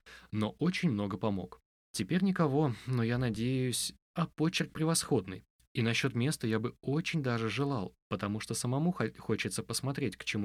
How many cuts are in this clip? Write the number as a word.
three